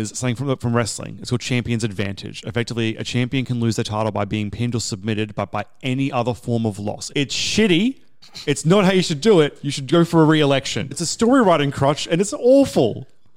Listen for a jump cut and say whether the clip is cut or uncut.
cut